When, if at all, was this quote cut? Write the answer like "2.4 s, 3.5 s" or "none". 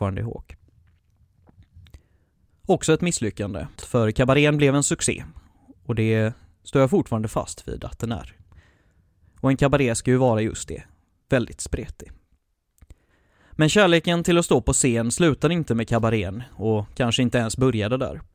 3.8 s